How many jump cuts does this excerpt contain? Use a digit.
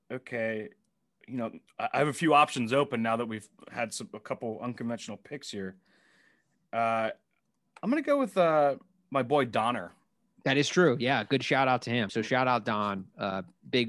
2